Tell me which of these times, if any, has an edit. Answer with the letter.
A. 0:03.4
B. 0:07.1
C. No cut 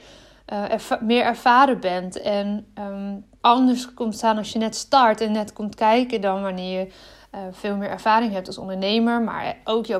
A